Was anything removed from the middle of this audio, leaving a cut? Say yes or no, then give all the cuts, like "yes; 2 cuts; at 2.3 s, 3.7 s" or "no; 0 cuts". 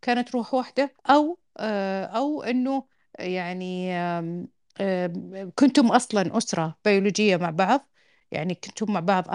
yes; 1 cut; at 1.0 s